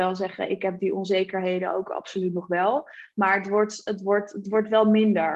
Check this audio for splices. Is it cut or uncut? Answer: uncut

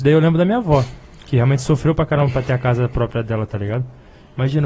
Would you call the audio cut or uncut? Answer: uncut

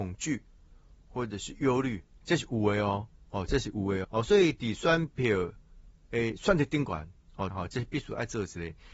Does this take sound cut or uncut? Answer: cut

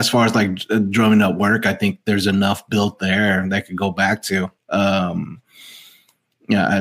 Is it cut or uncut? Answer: uncut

